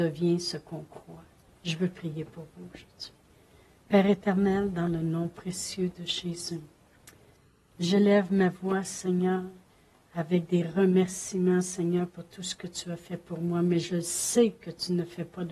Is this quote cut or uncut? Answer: cut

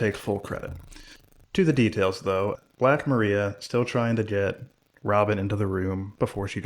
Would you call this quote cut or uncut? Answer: uncut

